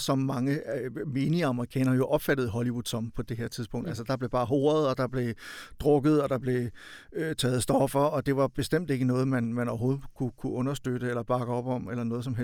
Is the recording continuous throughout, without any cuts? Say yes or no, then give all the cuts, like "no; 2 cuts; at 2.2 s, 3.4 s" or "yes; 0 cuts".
yes; 0 cuts